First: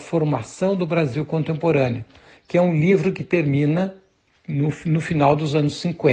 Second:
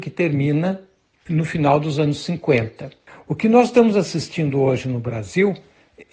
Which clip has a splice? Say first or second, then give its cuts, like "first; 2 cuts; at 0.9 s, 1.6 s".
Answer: second; 1 cut; at 1.3 s